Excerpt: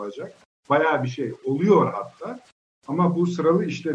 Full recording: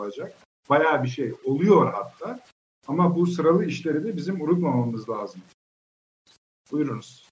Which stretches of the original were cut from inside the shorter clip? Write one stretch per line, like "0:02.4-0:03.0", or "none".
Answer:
none